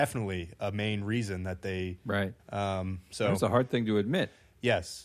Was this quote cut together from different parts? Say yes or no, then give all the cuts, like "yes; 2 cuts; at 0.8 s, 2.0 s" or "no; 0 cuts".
yes; 1 cut; at 2.4 s